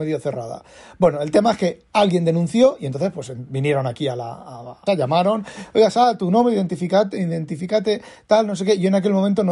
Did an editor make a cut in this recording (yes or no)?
yes